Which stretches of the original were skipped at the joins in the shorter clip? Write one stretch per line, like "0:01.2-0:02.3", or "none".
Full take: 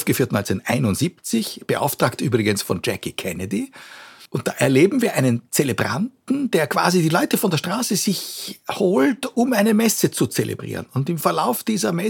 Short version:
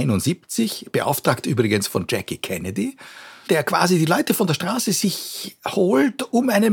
0:04.2-0:06.5